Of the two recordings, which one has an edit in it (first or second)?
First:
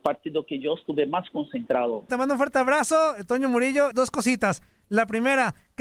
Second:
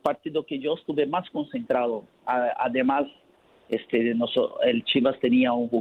first